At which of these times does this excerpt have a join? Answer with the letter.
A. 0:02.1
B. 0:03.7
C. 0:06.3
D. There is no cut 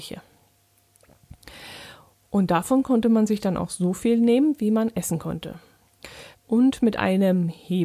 C